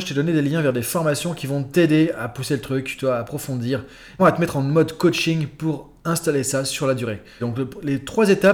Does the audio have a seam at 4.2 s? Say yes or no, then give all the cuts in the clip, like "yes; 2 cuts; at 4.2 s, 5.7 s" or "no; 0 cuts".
yes; 2 cuts; at 4.2 s, 7.4 s